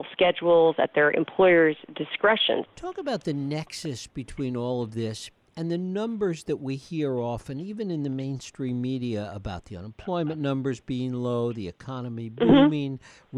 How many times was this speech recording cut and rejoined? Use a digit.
1